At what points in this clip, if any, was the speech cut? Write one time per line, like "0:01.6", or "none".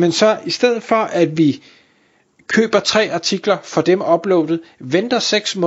none